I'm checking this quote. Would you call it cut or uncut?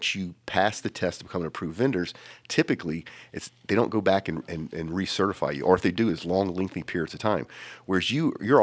uncut